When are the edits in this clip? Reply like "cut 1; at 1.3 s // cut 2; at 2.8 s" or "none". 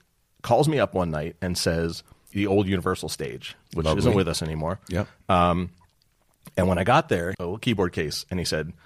cut 1; at 2.3 s // cut 2; at 7.3 s